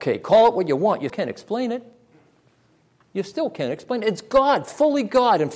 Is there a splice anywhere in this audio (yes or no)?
yes